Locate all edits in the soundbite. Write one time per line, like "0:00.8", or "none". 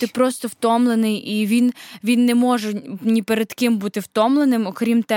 none